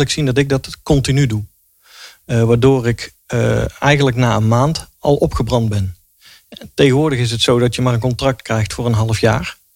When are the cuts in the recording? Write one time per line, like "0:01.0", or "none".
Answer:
none

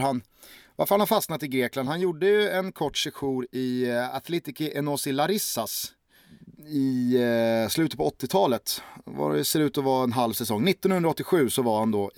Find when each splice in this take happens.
none

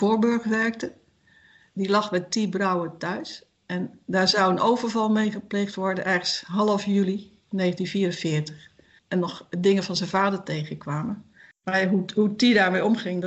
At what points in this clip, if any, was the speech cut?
0:01.7
0:09.0
0:11.5

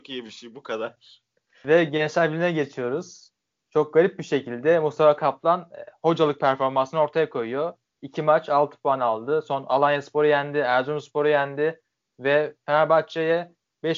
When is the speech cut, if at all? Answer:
none

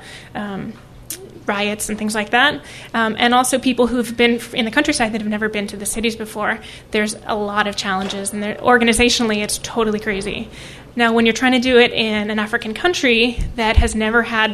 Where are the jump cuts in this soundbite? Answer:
0:10.9

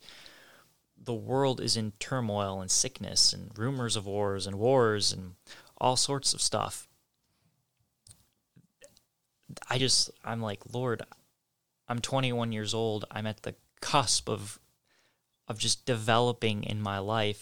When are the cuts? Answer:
none

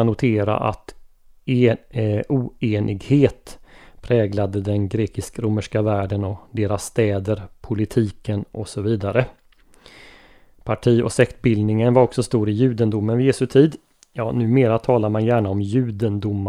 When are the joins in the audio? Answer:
none

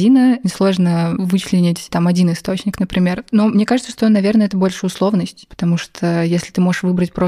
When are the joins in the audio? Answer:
none

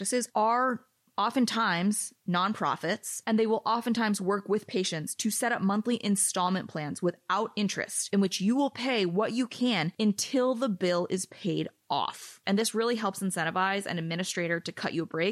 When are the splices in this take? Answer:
0:12.4

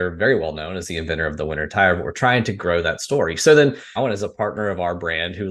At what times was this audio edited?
0:04.0

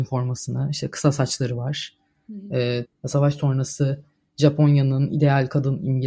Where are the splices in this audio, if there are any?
0:02.8

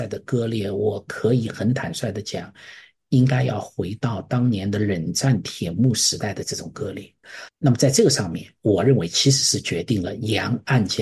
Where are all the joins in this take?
0:07.5

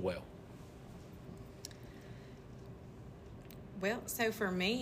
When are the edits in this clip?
none

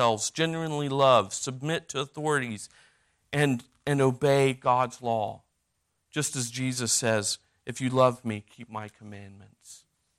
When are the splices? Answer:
none

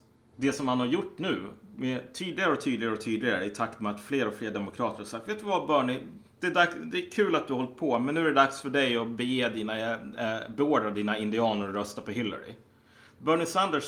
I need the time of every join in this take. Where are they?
none

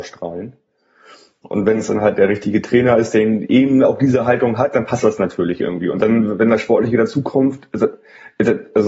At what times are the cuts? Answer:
none

